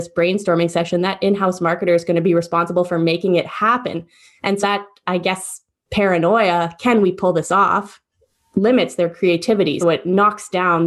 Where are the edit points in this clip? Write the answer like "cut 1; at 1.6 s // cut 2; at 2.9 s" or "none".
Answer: cut 1; at 4.6 s // cut 2; at 9.8 s